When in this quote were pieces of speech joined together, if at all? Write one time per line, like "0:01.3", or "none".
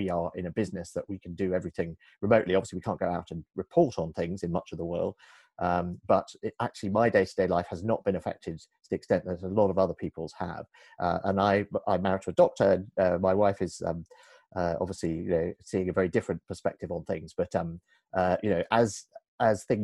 none